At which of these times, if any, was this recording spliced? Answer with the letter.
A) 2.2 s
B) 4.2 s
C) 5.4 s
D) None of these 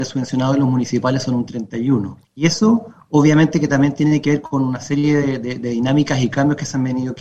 A